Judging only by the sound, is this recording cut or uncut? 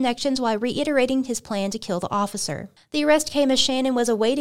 uncut